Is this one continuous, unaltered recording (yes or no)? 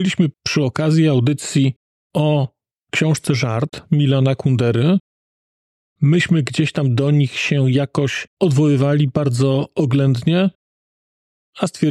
no